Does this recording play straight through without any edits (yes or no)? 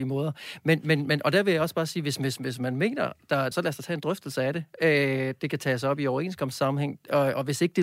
no